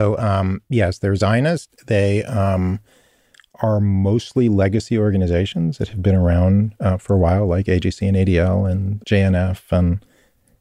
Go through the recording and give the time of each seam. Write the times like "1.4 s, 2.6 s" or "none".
9.0 s